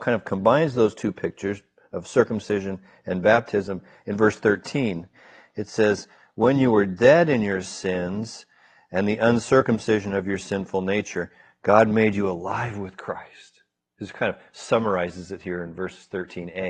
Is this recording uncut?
yes; 0 cuts

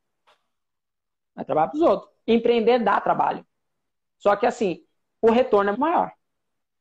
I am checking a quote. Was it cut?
yes; 1 cut; at 5.7 s

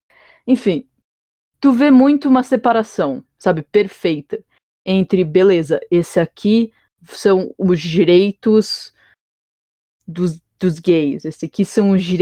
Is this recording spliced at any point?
no; 0 cuts

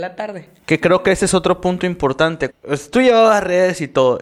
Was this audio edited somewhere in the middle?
yes; 1 cut; at 2.5 s

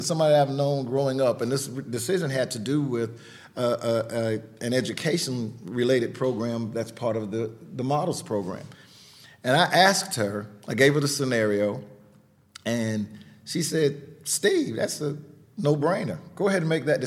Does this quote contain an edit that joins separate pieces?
no; 0 cuts

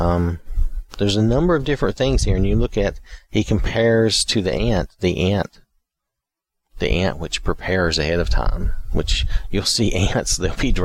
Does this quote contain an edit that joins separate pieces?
no; 0 cuts

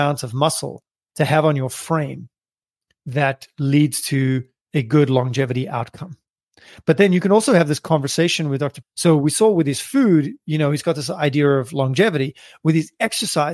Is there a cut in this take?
yes; 1 cut; at 8.8 s

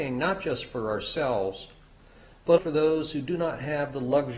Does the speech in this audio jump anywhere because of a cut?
yes; 1 cut; at 2.6 s

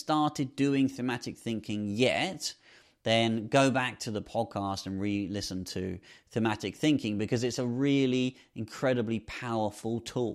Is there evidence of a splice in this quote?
no; 0 cuts

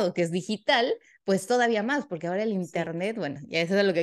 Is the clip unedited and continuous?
yes; 0 cuts

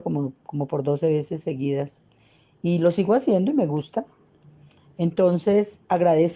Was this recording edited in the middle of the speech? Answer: no; 0 cuts

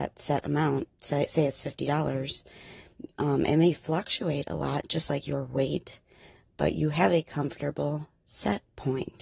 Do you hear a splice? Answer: no; 0 cuts

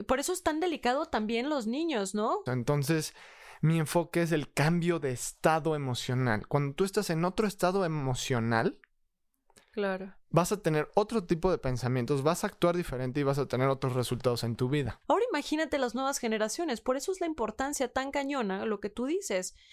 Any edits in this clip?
yes; 2 cuts; at 2.5 s, 15.0 s

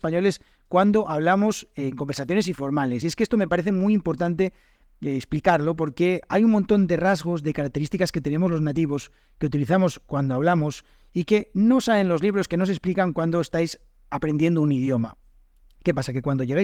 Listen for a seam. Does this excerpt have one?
no; 0 cuts

